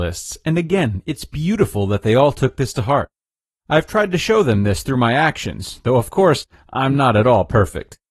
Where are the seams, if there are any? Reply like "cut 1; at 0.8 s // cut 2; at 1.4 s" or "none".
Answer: none